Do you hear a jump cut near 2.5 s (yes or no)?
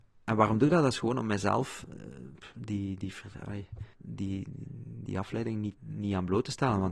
no